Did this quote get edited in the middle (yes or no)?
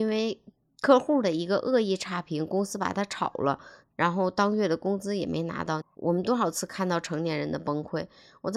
yes